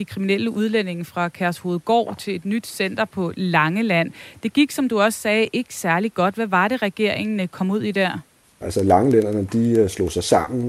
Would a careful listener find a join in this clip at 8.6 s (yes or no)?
yes